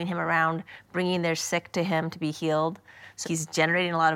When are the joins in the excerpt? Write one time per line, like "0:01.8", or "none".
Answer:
0:03.2